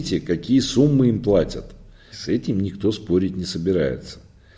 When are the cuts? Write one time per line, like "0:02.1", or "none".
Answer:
0:02.1